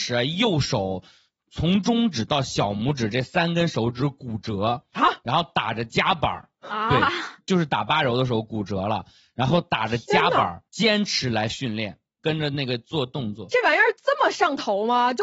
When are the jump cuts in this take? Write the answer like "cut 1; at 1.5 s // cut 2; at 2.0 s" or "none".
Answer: cut 1; at 10.7 s // cut 2; at 12.2 s